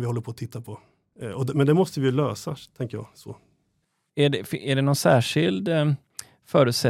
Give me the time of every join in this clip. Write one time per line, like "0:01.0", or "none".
none